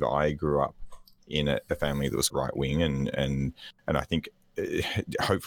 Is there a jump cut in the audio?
yes; 1 cut; at 2.3 s

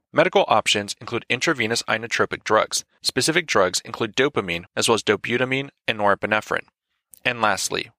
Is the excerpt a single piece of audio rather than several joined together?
no; 2 cuts; at 3.0 s, 4.7 s

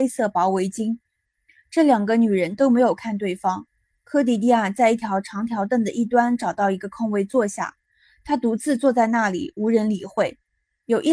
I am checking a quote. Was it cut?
no; 0 cuts

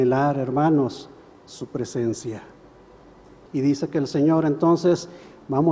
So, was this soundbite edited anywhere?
yes; 1 cut; at 3.5 s

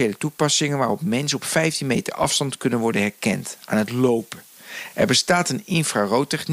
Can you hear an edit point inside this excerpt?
no; 0 cuts

